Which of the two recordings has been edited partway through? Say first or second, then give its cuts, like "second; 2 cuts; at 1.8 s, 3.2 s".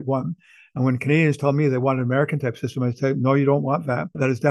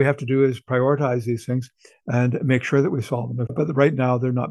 second; 1 cut; at 3.5 s